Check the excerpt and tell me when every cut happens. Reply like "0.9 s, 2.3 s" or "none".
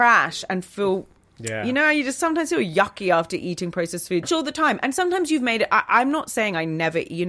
4.2 s